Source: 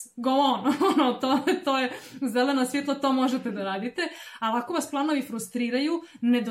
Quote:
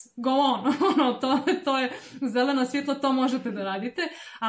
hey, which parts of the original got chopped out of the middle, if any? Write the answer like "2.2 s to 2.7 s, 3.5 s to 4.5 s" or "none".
none